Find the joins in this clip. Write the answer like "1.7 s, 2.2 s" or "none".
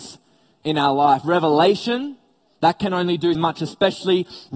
3.3 s